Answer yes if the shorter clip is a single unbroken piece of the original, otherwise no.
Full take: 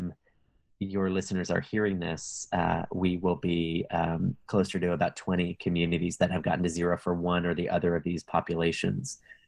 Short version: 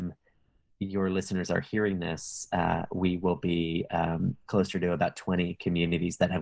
yes